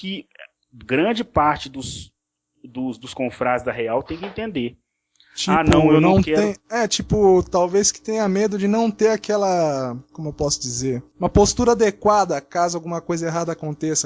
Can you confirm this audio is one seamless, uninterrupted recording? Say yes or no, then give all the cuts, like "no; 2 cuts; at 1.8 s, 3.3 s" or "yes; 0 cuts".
yes; 0 cuts